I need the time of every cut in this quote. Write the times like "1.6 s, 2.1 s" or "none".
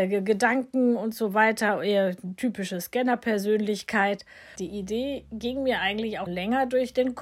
4.6 s, 6.3 s